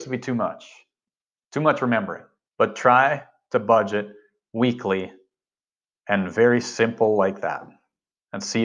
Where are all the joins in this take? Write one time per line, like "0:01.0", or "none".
0:02.5